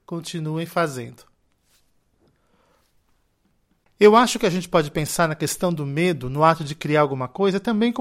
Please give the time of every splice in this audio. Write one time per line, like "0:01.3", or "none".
none